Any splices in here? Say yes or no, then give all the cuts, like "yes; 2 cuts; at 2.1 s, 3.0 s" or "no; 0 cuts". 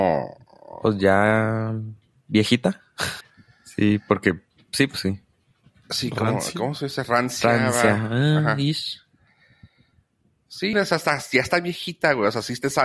yes; 2 cuts; at 3.2 s, 10.7 s